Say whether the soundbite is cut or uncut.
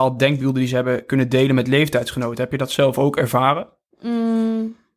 uncut